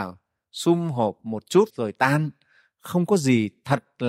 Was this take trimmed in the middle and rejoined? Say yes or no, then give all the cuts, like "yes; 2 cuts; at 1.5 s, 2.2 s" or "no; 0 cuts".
yes; 1 cut; at 1.7 s